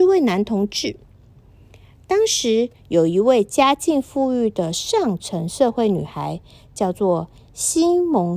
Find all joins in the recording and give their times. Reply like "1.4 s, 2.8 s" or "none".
none